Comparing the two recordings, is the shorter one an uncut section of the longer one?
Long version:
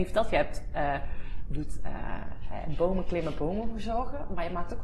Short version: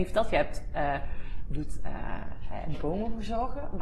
no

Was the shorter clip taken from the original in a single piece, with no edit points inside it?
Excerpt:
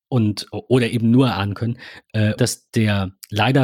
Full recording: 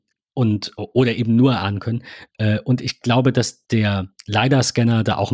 no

